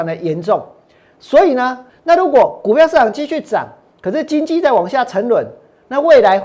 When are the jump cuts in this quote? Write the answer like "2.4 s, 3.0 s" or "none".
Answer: 1.9 s